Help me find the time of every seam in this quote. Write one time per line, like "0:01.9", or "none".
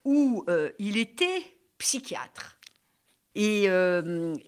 0:03.3